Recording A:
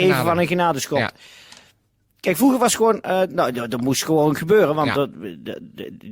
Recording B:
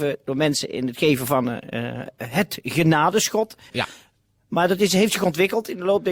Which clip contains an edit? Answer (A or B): B